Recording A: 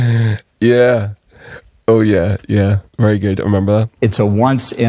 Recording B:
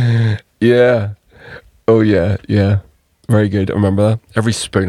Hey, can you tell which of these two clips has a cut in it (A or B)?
A